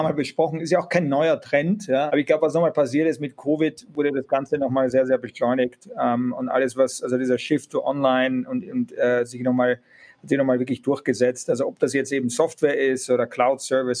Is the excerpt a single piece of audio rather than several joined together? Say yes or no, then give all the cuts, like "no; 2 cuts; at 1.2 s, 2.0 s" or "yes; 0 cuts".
no; 1 cut; at 2.1 s